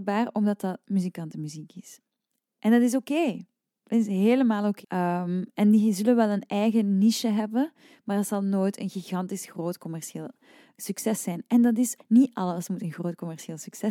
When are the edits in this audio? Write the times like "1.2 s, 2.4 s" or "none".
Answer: 4.8 s, 12.0 s